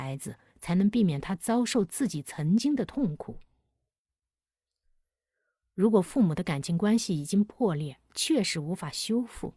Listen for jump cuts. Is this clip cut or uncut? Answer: uncut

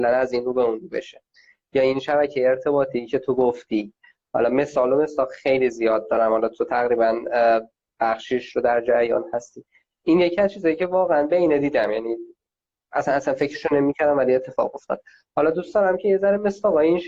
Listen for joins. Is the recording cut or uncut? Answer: uncut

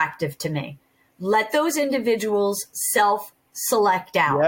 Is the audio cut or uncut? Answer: cut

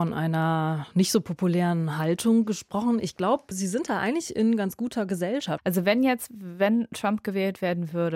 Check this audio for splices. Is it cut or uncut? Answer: cut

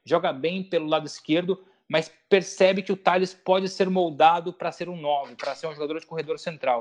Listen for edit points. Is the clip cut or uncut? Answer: uncut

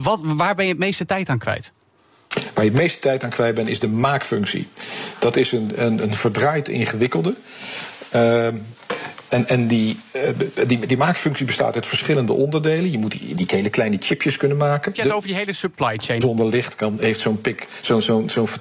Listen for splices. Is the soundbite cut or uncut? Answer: cut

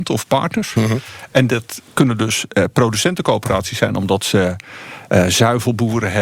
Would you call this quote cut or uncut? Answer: uncut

